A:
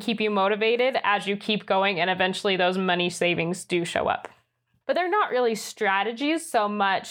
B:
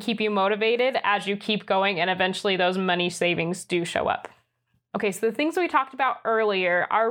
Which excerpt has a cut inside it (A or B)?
A